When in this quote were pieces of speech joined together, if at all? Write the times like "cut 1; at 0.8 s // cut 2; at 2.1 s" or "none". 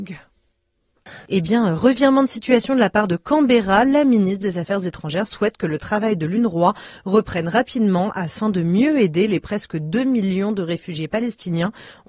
cut 1; at 1.3 s